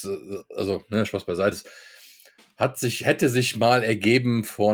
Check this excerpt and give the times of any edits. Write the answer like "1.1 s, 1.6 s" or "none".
1.5 s